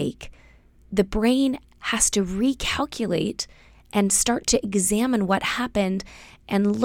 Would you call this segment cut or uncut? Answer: uncut